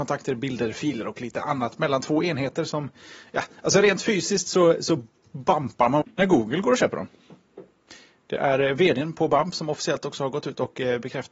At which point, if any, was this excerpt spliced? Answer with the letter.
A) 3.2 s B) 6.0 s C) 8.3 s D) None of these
B